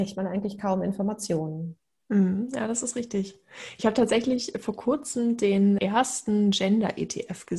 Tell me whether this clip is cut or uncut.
cut